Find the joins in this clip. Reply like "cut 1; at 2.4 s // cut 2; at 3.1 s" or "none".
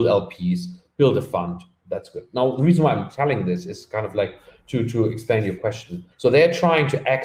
cut 1; at 6.1 s